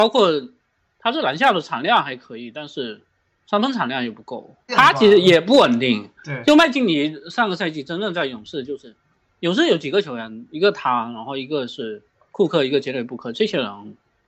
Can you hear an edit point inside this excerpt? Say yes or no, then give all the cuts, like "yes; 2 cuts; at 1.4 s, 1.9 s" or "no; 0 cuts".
yes; 1 cut; at 4.7 s